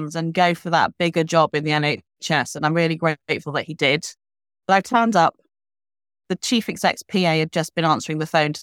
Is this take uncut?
yes; 0 cuts

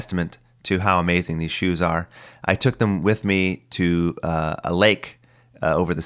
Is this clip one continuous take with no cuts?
yes; 0 cuts

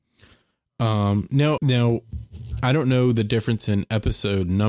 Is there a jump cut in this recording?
yes; 1 cut; at 1.6 s

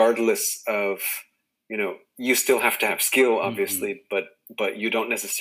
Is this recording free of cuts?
yes; 0 cuts

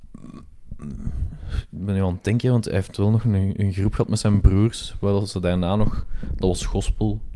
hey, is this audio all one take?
yes; 0 cuts

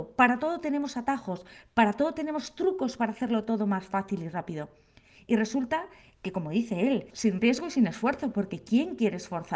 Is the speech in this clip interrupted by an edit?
yes; 1 cut; at 7.1 s

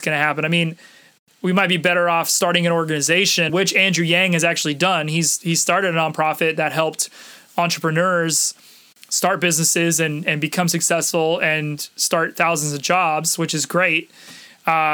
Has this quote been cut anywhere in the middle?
yes; 1 cut; at 3.5 s

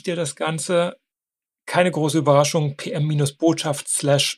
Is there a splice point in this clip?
no; 0 cuts

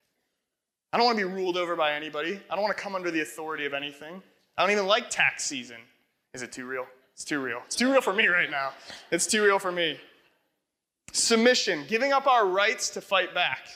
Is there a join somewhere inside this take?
no; 0 cuts

